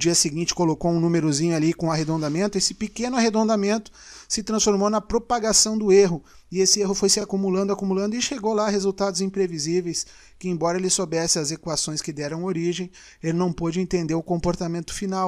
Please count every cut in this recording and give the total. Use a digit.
0